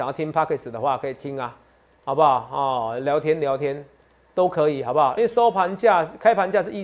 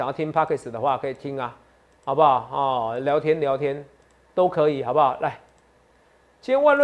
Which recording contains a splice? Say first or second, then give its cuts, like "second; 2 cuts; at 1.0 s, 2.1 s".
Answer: first; 1 cut; at 5.2 s